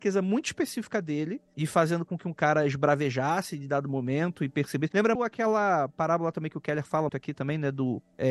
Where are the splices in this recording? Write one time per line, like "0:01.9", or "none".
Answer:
0:05.2
0:07.1